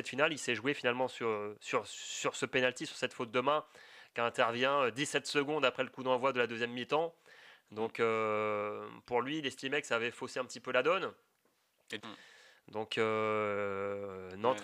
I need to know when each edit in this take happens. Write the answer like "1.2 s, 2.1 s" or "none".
12.0 s